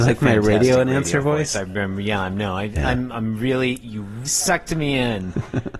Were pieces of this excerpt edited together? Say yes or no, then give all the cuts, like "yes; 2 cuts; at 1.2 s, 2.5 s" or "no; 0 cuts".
yes; 2 cuts; at 3.1 s, 4.3 s